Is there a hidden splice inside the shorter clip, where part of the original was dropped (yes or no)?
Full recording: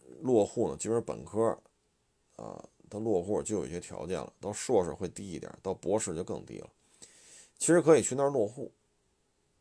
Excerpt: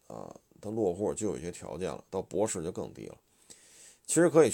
yes